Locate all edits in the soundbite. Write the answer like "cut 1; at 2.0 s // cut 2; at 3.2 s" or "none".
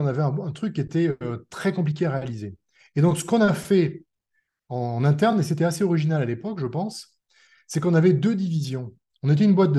none